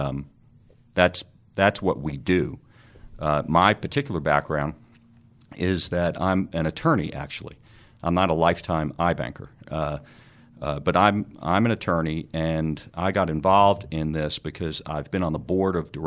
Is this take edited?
yes; 1 cut; at 9.6 s

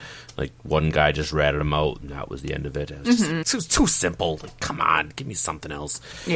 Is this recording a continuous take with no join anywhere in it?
no; 1 cut; at 3.4 s

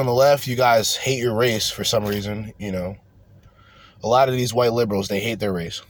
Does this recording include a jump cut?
no; 0 cuts

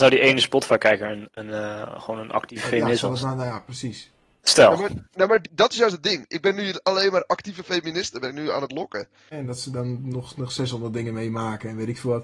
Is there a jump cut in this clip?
yes; 2 cuts; at 5.4 s, 9.3 s

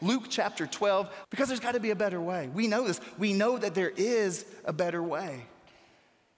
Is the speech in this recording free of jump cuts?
no; 1 cut; at 1.2 s

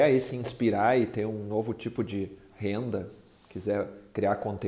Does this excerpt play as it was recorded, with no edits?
yes; 0 cuts

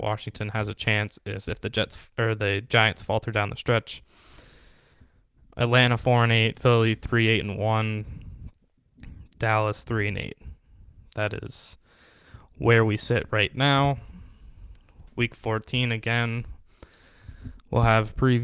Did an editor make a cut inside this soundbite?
yes; 1 cut; at 6.5 s

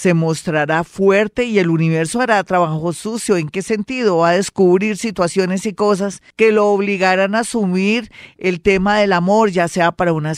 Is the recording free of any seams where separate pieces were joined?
no; 1 cut; at 6.3 s

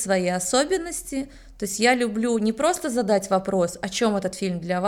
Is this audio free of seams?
yes; 0 cuts

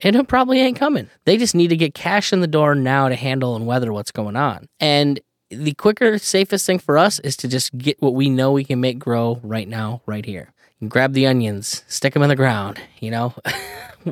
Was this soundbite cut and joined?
no; 0 cuts

